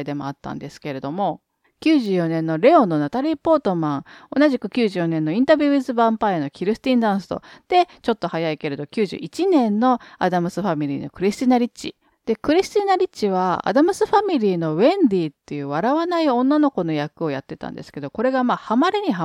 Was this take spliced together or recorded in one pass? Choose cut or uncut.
cut